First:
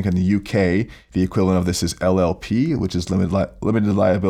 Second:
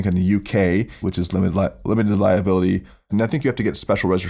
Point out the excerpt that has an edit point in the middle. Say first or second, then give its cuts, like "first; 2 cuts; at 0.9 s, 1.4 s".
second; 2 cuts; at 1.0 s, 3.1 s